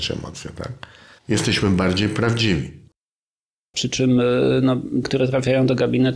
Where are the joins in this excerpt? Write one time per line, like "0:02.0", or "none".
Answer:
0:03.7
0:05.0